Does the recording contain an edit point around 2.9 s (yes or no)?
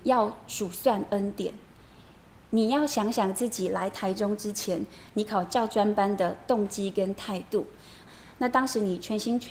no